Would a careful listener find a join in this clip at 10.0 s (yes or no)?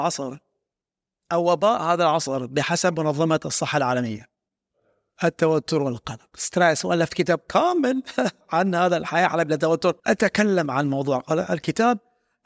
yes